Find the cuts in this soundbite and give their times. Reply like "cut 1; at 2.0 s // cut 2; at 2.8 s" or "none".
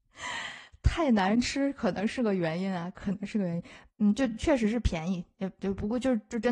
cut 1; at 3.9 s